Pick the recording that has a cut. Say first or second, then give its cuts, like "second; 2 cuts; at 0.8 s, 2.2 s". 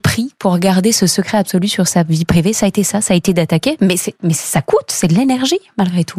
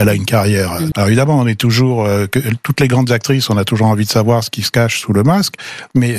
second; 1 cut; at 0.9 s